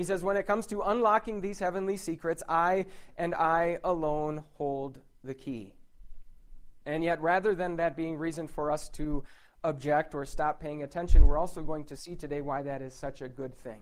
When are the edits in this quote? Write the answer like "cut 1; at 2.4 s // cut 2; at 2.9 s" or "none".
cut 1; at 6.8 s